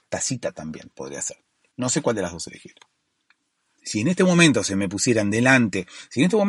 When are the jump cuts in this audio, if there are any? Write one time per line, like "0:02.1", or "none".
0:01.7

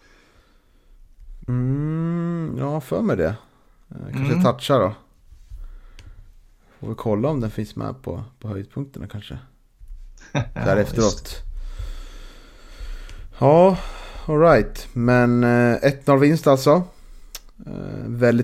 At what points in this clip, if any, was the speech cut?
0:01.4

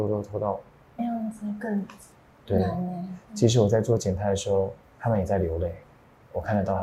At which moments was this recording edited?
0:01.0
0:04.8

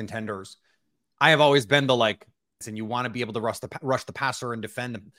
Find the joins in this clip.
0:02.6

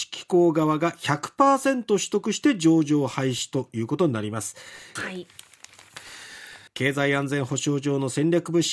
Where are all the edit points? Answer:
0:05.0
0:06.7

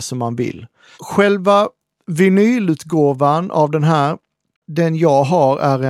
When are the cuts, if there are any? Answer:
0:00.9

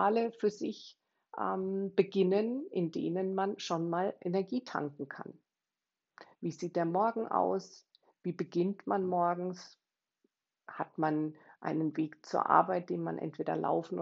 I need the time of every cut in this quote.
none

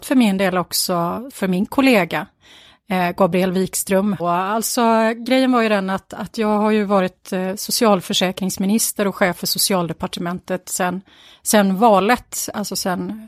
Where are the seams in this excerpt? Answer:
0:01.3
0:04.2

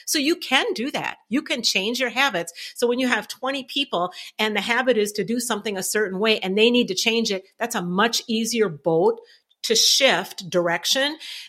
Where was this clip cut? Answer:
none

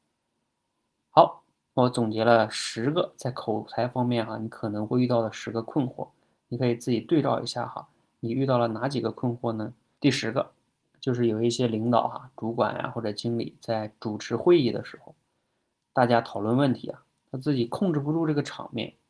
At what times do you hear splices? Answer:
0:10.0

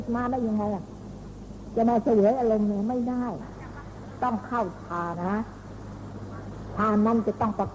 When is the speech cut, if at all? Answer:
0:05.1

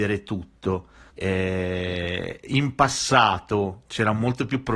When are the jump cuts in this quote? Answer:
0:01.1

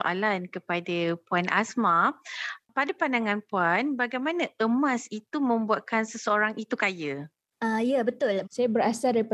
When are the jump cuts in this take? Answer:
0:08.4

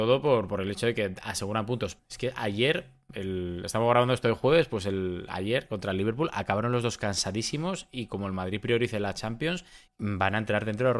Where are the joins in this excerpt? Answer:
0:02.0
0:09.9

